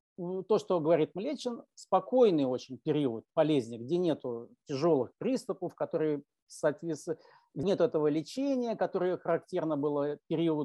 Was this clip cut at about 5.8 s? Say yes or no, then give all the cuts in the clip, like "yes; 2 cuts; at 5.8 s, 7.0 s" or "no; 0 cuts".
no; 1 cut; at 7.6 s